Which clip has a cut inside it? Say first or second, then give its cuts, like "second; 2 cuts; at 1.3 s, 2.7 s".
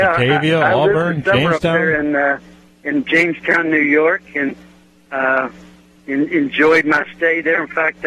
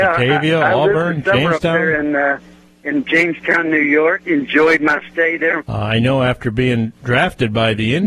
second; 2 cuts; at 4.2 s, 5.6 s